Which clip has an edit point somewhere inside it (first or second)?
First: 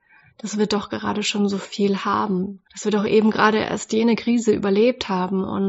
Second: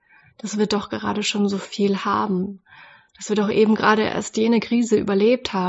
first